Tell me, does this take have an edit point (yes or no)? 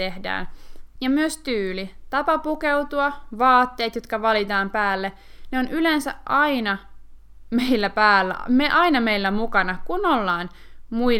yes